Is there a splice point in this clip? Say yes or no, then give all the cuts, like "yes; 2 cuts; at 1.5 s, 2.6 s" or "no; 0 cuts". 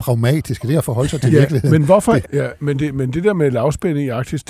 yes; 1 cut; at 2.2 s